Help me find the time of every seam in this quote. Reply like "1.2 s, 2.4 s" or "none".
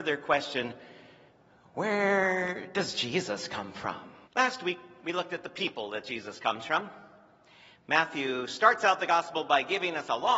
4.2 s